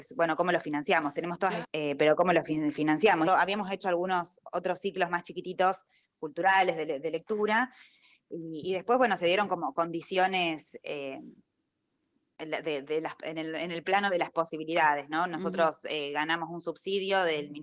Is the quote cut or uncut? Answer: cut